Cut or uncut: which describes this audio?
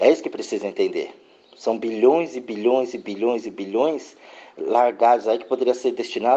uncut